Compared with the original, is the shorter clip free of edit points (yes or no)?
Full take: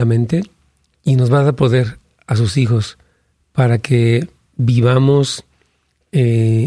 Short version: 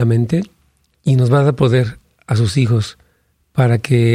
yes